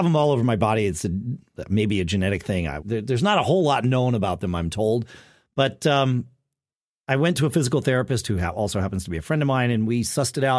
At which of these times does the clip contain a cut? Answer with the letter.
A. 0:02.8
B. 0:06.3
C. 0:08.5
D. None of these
A